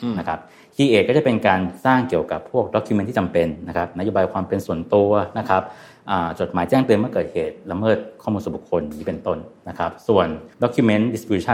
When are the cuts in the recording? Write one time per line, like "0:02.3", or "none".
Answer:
0:10.5